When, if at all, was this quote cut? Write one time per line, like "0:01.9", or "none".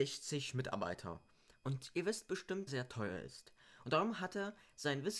0:01.6
0:02.7
0:03.8